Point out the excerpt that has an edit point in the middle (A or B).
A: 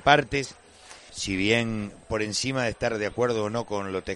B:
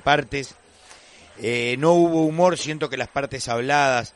A